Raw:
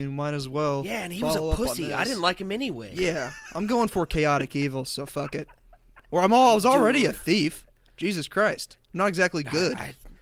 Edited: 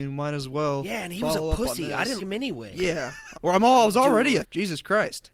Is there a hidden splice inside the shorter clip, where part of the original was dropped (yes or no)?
yes